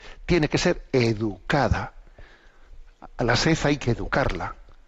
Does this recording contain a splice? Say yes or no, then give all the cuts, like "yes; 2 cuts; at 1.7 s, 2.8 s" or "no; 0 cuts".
no; 0 cuts